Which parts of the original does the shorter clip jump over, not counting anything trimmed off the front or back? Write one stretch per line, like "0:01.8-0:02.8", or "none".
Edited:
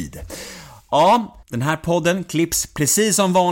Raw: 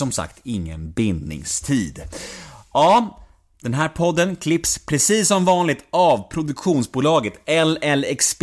0:03.3-0:03.5